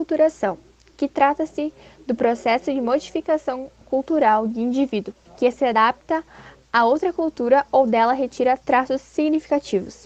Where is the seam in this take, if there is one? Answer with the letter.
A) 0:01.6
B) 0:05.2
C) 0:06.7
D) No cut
B